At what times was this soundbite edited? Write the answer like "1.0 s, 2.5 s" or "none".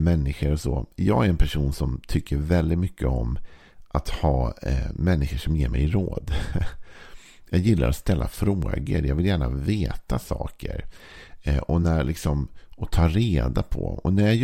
none